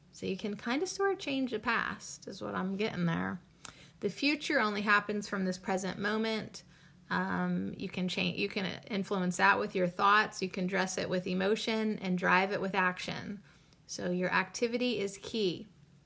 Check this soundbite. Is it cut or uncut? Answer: uncut